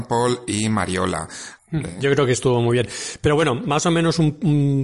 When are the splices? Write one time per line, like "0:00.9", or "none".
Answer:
0:01.6

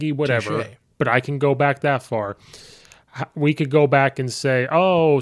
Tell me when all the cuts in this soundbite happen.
none

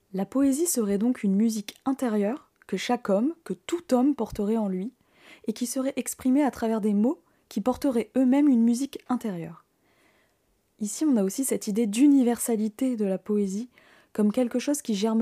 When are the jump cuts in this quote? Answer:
none

